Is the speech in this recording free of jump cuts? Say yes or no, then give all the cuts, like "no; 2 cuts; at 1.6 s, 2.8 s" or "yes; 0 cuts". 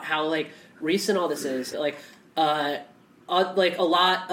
no; 1 cut; at 1.7 s